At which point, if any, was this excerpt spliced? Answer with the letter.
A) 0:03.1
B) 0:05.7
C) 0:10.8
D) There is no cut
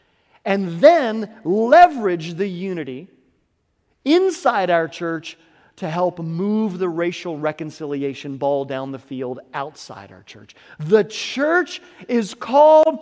D